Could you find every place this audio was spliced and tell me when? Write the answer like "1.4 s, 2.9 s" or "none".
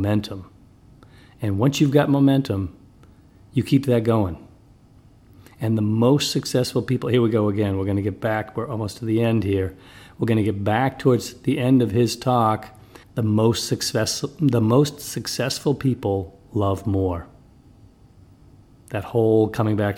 13.0 s